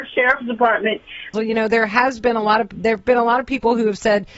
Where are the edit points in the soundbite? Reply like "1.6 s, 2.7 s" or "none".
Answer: 1.3 s

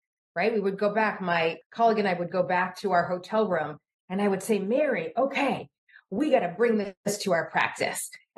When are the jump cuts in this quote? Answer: none

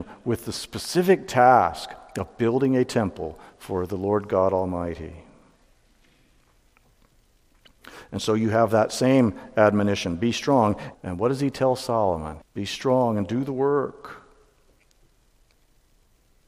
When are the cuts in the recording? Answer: 10.9 s, 12.4 s

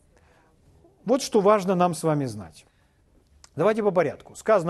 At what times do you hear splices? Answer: none

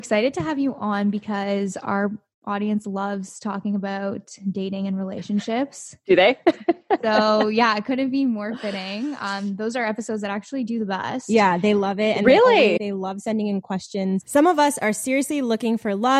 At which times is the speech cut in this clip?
12.8 s, 14.2 s

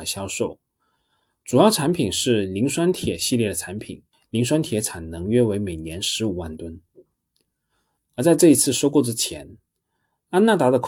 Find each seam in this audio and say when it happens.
none

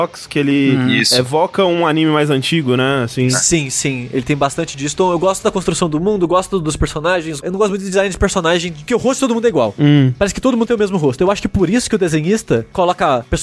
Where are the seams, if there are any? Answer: none

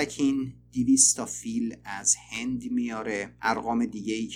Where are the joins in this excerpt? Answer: 3.4 s

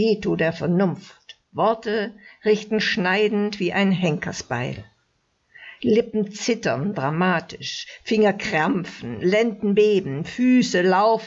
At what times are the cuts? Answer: 1.4 s, 5.8 s

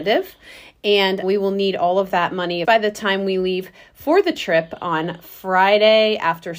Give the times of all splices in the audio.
1.2 s, 2.6 s

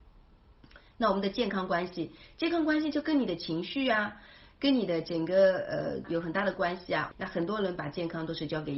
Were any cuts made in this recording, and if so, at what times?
6.0 s, 7.1 s

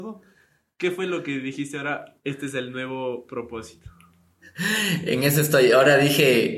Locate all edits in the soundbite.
none

